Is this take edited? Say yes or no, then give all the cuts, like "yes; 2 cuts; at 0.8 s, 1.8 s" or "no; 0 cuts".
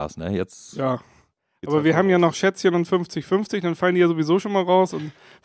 no; 0 cuts